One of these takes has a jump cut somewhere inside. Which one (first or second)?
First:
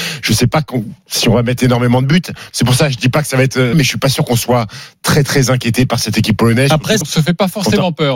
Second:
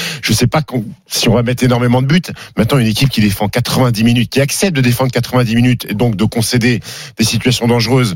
first